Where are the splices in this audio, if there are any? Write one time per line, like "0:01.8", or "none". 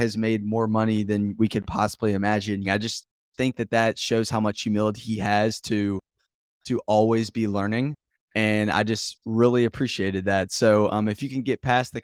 0:02.6